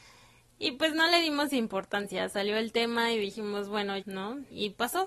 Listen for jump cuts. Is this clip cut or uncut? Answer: cut